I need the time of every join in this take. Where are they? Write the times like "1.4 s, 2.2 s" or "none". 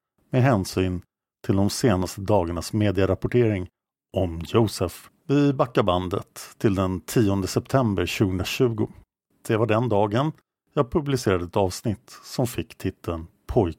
5.1 s